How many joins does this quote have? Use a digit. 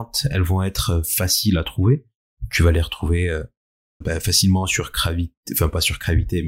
1